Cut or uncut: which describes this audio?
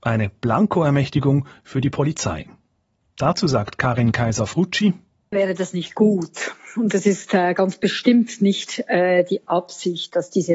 cut